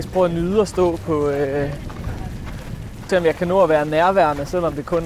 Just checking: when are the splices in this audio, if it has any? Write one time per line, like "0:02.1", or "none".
0:03.1